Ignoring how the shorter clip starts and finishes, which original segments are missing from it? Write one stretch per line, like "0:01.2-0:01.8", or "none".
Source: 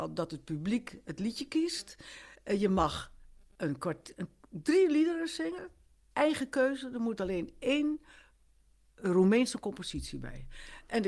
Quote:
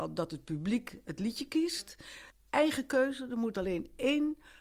0:02.3-0:05.9